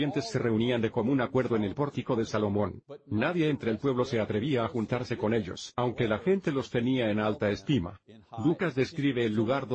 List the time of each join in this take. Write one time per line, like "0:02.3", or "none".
none

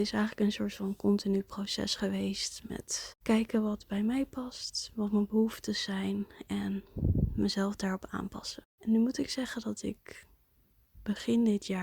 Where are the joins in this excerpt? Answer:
none

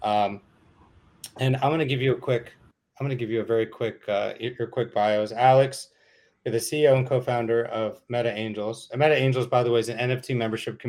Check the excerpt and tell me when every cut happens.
none

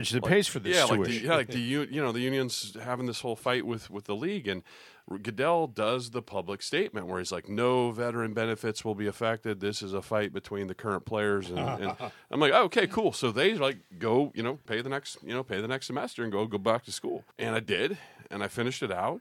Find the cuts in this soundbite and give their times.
0:14.7
0:17.3

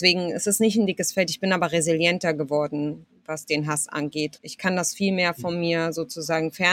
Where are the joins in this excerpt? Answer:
0:04.4

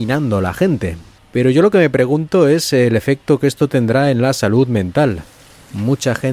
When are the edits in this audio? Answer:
0:01.2

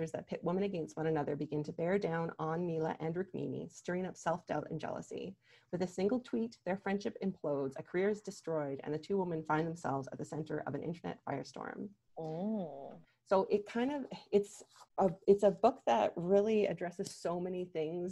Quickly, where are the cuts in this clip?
0:13.0
0:14.9

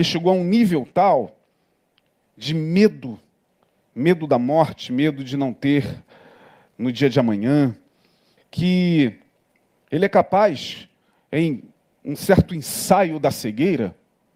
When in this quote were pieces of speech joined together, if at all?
0:08.4

